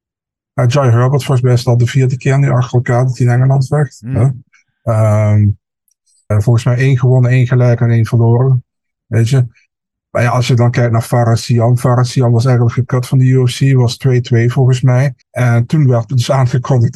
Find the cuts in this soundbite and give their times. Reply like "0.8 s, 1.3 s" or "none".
6.3 s, 8.7 s, 15.2 s